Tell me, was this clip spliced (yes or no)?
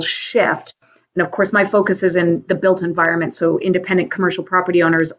no